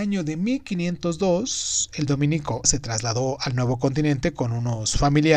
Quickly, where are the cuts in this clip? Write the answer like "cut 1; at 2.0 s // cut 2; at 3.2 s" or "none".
cut 1; at 2.6 s